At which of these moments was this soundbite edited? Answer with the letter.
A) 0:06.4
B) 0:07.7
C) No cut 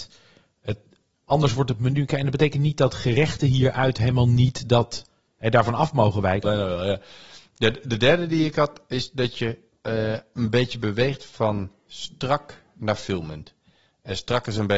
A